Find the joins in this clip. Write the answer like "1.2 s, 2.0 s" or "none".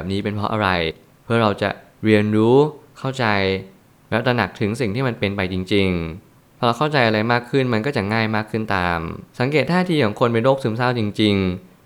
9.3 s

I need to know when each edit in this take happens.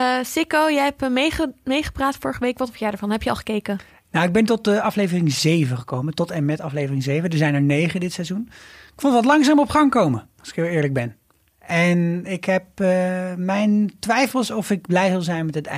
none

